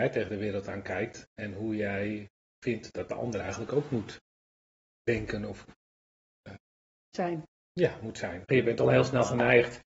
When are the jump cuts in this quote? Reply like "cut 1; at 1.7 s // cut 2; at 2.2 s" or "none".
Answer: cut 1; at 8.5 s

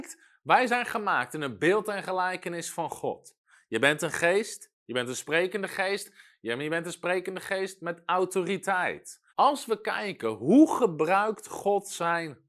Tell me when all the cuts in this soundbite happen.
cut 1; at 9.3 s

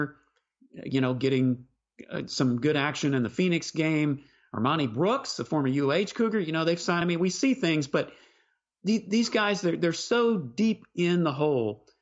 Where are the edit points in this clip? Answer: none

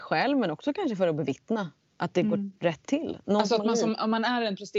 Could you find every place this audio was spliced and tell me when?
none

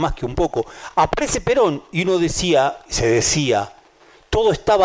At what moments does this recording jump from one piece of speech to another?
none

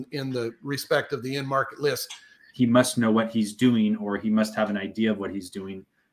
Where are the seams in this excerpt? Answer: cut 1; at 2.5 s

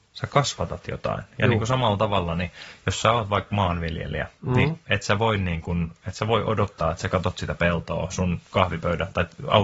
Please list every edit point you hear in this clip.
none

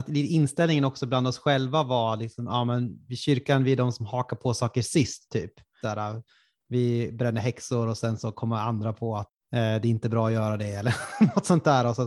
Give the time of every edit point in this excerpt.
cut 1; at 5.8 s // cut 2; at 9.4 s

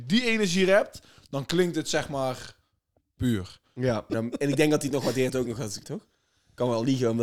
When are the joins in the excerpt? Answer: cut 1; at 4.1 s // cut 2; at 5.8 s

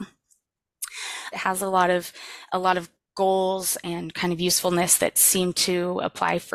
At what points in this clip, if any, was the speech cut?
cut 1; at 1.3 s

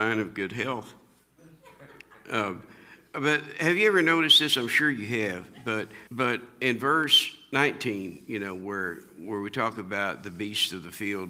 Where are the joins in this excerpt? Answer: cut 1; at 6.1 s

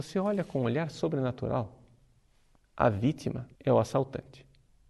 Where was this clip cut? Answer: cut 1; at 3.5 s

